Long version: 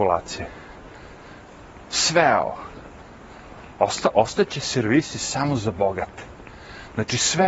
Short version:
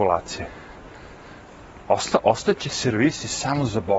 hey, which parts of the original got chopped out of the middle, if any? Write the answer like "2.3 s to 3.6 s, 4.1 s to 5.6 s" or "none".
1.8 s to 3.7 s